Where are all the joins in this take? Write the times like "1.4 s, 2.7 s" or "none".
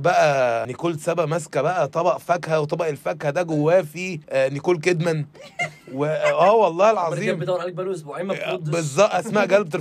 4.2 s